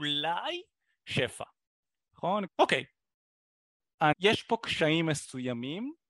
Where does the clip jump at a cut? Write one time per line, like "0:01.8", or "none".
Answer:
0:02.5
0:04.1